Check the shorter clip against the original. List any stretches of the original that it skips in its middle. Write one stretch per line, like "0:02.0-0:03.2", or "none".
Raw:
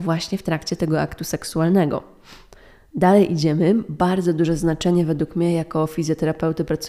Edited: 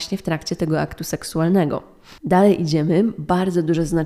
0:02.4-0:02.9